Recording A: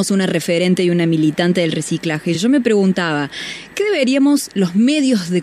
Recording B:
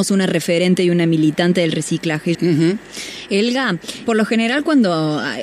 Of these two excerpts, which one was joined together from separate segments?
B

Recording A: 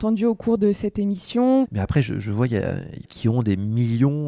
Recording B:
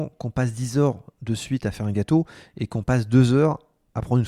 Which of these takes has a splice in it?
A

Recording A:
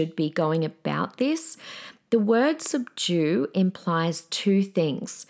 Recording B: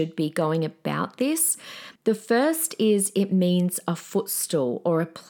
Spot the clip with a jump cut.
B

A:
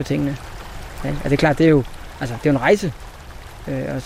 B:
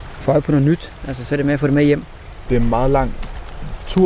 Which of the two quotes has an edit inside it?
B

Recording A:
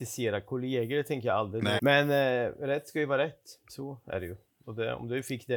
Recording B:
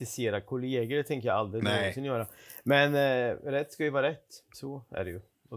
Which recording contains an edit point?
A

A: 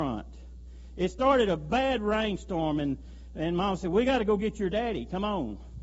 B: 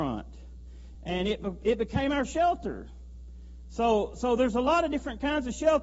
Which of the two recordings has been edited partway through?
B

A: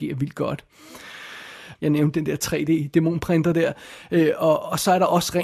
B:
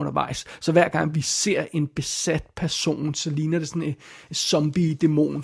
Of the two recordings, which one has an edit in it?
A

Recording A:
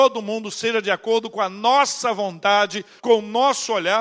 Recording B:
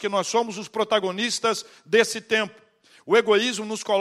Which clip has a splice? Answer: A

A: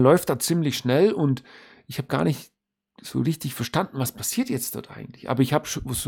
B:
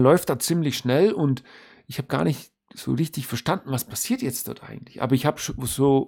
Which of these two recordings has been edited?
B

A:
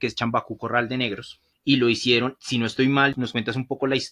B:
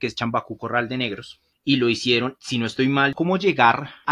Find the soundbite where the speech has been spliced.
B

